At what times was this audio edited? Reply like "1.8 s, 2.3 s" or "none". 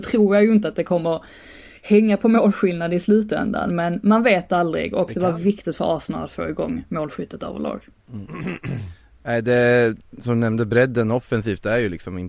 10.2 s